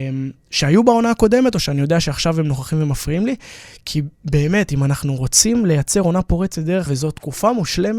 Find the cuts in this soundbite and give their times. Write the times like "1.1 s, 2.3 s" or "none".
6.9 s

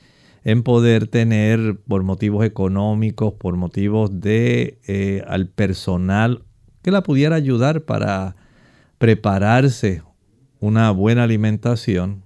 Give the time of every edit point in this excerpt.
none

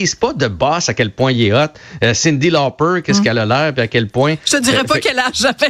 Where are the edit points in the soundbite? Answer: none

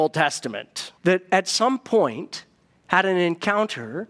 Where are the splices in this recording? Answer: 1.0 s

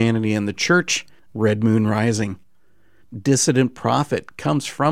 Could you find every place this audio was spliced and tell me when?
1.3 s, 3.0 s

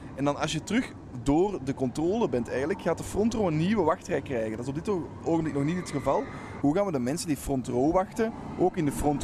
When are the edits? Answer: 6.6 s

